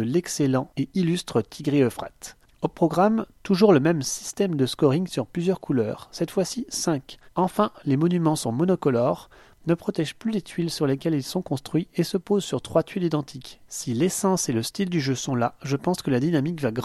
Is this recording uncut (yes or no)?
no